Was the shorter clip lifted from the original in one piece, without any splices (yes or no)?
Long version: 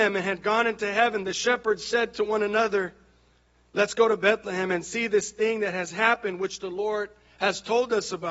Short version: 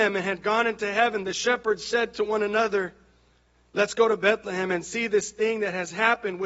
yes